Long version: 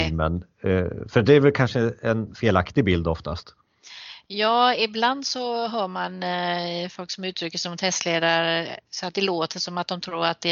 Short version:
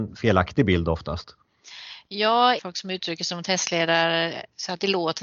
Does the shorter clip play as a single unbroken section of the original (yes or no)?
no